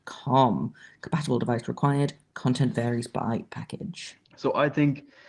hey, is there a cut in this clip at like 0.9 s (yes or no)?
no